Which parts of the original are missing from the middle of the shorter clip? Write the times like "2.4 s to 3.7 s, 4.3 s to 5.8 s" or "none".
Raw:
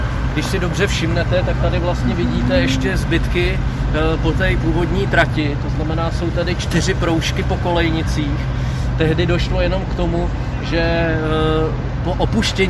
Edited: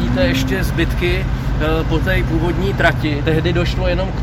5.6 s to 9.0 s